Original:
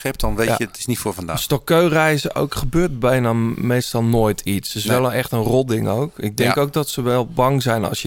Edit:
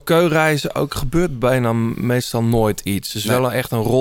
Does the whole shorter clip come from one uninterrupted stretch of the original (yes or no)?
yes